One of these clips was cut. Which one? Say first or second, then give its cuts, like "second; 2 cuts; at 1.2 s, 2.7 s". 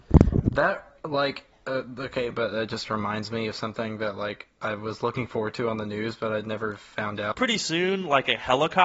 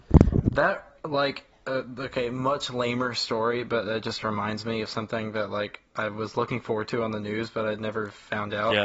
first; 2 cuts; at 2.3 s, 7.3 s